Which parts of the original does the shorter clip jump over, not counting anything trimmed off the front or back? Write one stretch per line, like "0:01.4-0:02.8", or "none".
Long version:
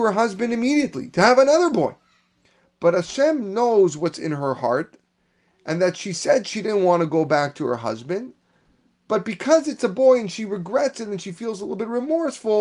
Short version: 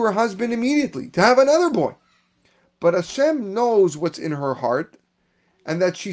none